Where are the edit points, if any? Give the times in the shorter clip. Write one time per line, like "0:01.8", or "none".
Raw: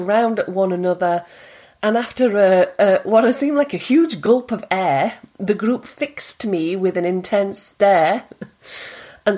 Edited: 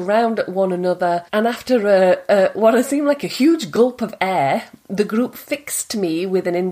0:01.3